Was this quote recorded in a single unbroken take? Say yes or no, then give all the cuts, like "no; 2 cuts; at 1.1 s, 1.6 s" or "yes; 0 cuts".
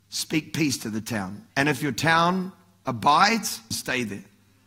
no; 2 cuts; at 1.5 s, 3.7 s